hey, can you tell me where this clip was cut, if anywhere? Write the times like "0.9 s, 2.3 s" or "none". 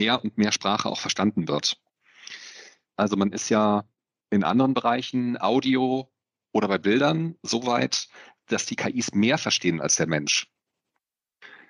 2.9 s